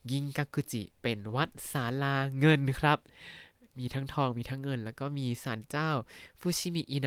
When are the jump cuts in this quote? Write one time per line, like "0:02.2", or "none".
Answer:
none